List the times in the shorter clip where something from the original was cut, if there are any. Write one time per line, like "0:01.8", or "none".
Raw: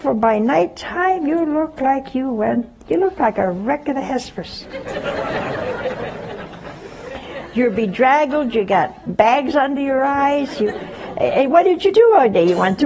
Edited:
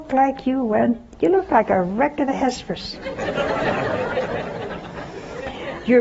none